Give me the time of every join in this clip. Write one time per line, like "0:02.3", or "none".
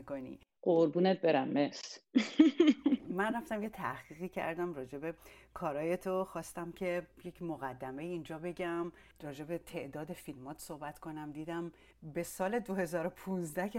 none

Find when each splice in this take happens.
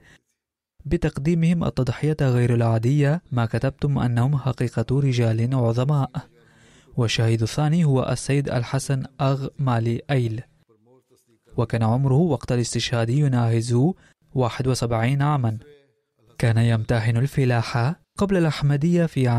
0:03.3

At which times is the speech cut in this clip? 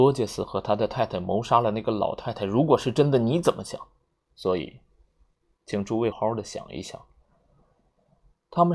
0:04.3
0:06.1

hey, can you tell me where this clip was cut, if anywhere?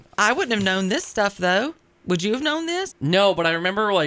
0:02.9

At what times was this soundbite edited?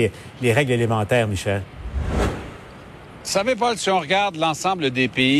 none

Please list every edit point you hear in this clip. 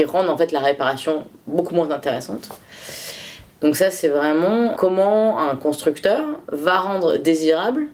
0:03.5
0:04.7

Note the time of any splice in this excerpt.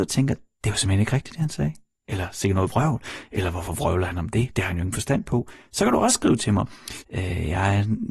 0:07.0

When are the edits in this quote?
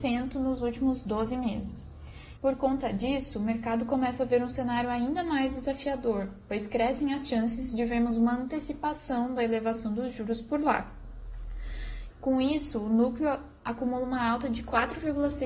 0:02.4
0:12.1

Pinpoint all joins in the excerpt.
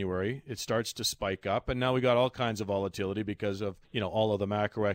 0:03.8

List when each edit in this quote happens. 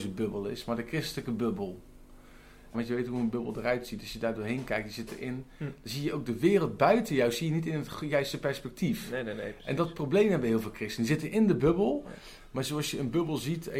0:02.7

